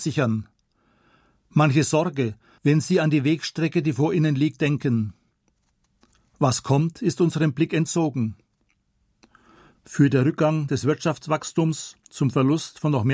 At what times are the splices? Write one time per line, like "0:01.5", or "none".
0:02.6
0:09.7